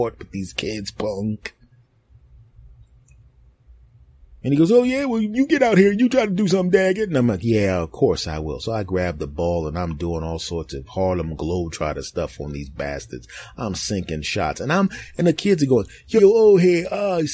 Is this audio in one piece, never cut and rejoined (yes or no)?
no